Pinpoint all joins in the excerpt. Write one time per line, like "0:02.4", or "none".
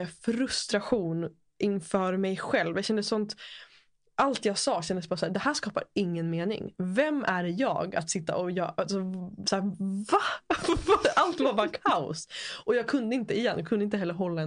none